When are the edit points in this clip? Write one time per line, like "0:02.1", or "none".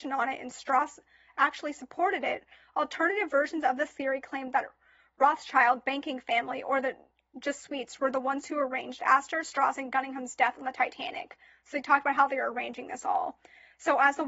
none